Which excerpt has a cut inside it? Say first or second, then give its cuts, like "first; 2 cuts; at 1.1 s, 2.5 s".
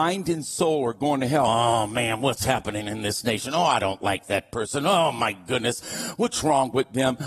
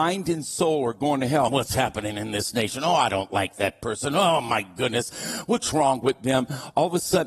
second; 1 cut; at 1.5 s